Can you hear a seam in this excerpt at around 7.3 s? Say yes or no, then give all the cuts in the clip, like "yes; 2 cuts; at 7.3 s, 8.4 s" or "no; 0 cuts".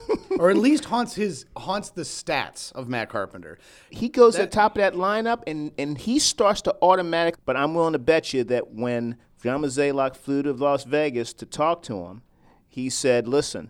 yes; 2 cuts; at 3.9 s, 7.3 s